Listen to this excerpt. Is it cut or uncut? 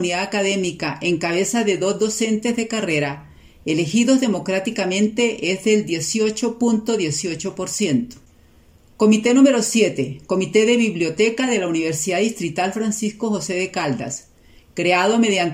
uncut